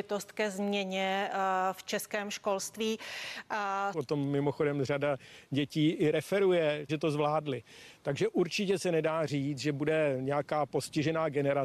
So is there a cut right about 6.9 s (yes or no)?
yes